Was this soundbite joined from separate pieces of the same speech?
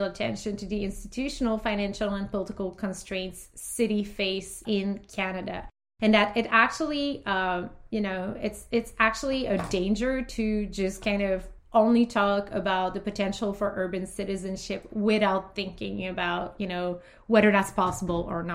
no; 0 cuts

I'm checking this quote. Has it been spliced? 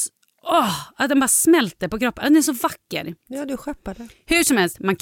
yes; 1 cut; at 3.3 s

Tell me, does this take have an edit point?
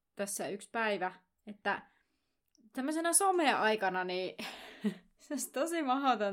no; 0 cuts

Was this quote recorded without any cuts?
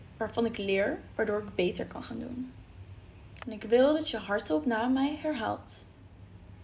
no; 1 cut; at 3.4 s

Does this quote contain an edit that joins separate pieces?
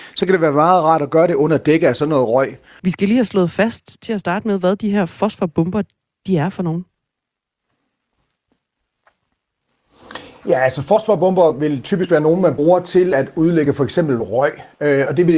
yes; 1 cut; at 2.8 s

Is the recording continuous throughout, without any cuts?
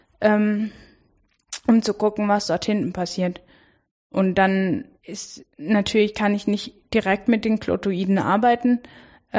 no; 1 cut; at 5.0 s

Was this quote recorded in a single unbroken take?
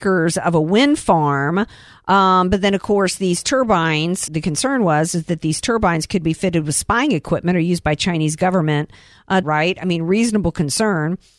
no; 2 cuts; at 4.3 s, 9.4 s

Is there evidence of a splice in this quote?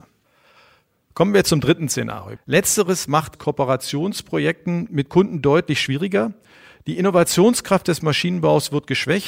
yes; 1 cut; at 2.4 s

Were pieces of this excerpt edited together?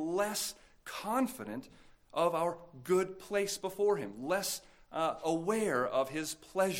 no; 0 cuts

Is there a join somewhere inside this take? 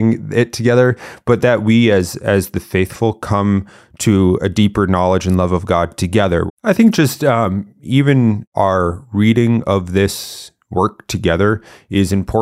yes; 1 cut; at 6.5 s

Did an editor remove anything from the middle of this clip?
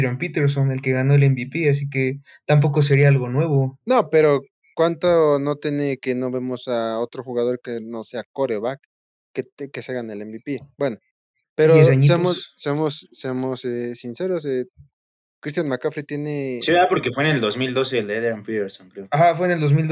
no; 0 cuts

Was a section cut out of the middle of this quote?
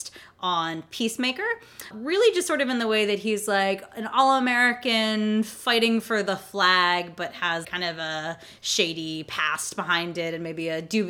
yes; 2 cuts; at 1.9 s, 7.6 s

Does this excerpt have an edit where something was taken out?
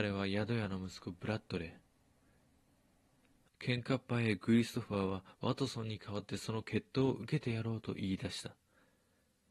yes; 1 cut; at 3.5 s

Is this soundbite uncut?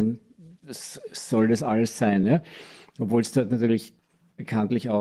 yes; 0 cuts

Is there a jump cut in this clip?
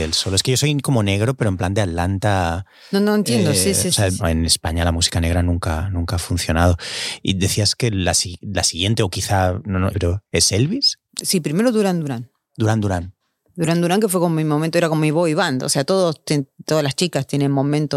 yes; 3 cuts; at 4.2 s, 9.9 s, 11.1 s

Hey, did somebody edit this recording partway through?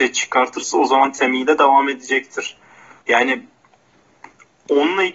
yes; 1 cut; at 3.0 s

